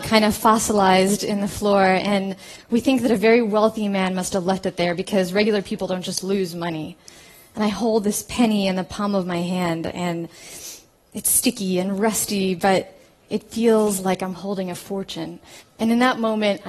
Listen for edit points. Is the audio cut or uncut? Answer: cut